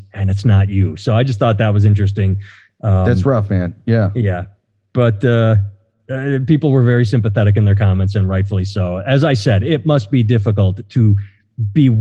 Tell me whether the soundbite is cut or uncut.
uncut